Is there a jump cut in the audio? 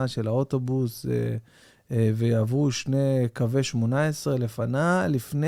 no; 0 cuts

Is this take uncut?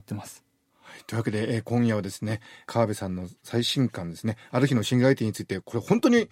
yes; 0 cuts

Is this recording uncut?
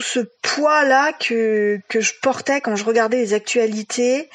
yes; 0 cuts

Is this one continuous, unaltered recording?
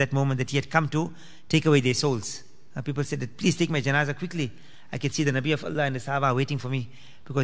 yes; 0 cuts

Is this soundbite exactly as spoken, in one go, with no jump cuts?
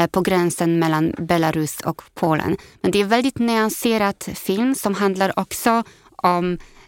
yes; 0 cuts

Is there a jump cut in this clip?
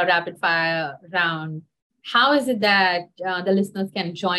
no; 0 cuts

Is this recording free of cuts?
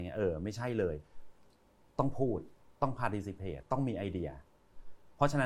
no; 1 cut; at 3.6 s

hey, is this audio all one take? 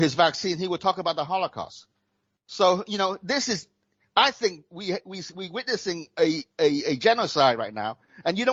yes; 0 cuts

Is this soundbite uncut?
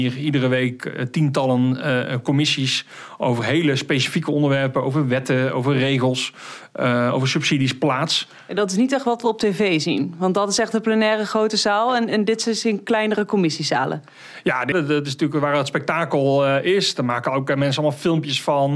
no; 1 cut; at 14.7 s

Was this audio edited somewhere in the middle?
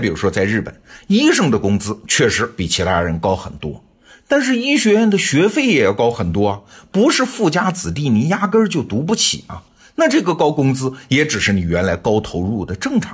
no; 0 cuts

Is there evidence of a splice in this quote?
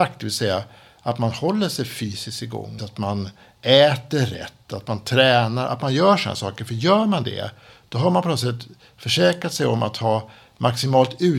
yes; 1 cut; at 2.8 s

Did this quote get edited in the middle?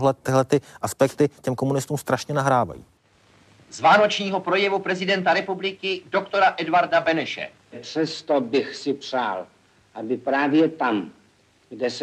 no; 0 cuts

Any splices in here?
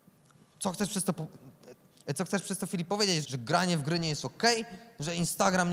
yes; 1 cut; at 3.2 s

